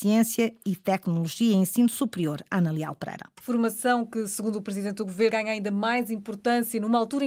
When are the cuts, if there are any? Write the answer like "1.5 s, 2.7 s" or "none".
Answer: 3.4 s, 5.3 s